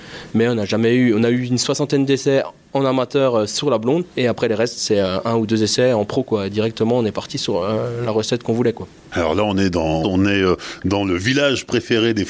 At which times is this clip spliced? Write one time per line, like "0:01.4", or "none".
0:04.1
0:10.0